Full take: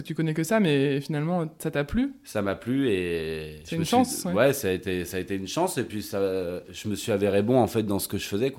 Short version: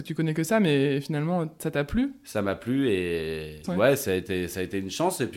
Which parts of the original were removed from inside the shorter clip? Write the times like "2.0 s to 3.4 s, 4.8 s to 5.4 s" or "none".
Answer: 3.6 s to 4.2 s